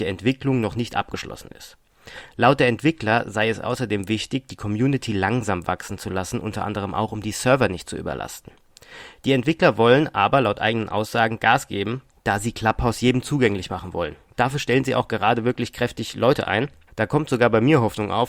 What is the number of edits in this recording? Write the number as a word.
one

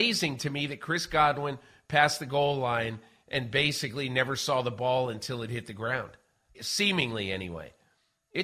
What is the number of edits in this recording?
one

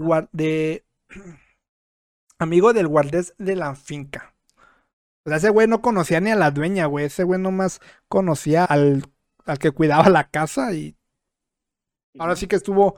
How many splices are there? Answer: one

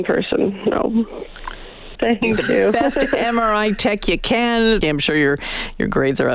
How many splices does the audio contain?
two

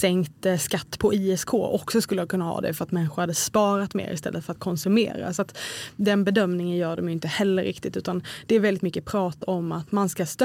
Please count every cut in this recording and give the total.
zero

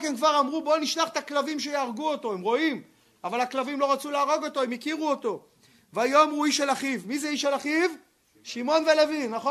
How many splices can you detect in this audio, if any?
zero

